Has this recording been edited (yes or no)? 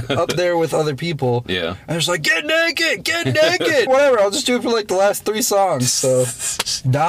yes